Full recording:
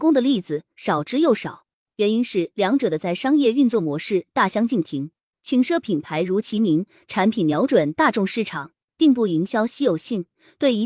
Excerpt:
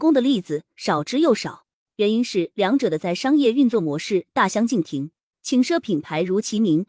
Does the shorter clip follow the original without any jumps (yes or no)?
yes